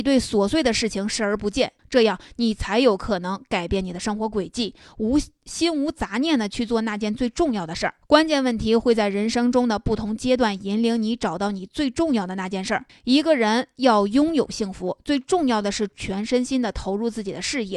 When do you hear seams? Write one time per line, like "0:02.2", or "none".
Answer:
0:01.8
0:08.0
0:12.9